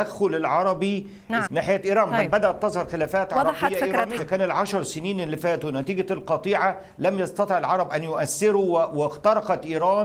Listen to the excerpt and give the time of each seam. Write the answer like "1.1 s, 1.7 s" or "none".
1.5 s, 4.2 s